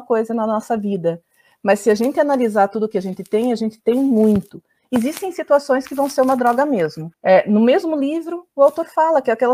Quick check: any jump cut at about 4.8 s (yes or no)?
no